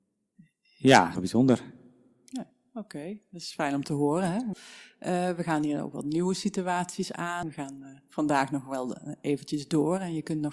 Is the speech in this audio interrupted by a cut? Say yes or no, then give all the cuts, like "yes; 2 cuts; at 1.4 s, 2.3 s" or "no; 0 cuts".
yes; 3 cuts; at 1.2 s, 4.5 s, 7.4 s